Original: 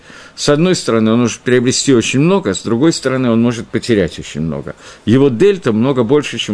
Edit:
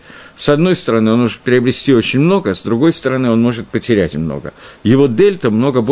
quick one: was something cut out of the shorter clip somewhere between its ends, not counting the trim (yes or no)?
yes